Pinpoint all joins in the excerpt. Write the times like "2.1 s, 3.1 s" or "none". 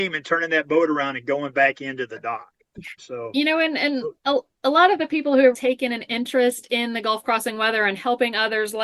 3.0 s, 5.5 s